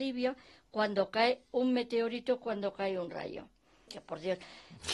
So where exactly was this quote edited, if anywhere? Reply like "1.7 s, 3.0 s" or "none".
3.9 s